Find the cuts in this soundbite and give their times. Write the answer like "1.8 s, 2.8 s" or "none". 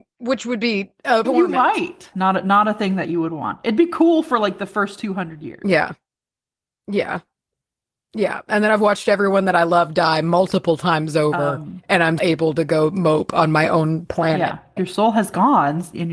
1.2 s, 12.2 s, 14.8 s